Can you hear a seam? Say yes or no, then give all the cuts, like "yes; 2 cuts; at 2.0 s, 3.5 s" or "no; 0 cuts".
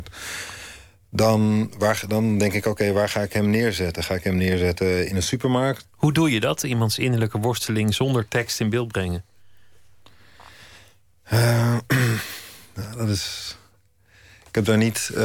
yes; 1 cut; at 5.8 s